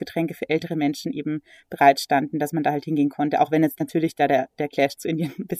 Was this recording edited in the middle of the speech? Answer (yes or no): no